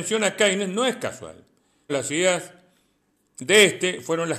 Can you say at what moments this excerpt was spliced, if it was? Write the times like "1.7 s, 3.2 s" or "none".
1.9 s